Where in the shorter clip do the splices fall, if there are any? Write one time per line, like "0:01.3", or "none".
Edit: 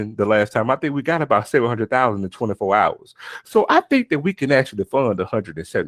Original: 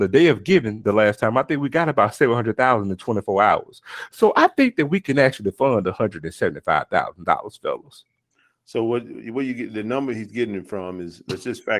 none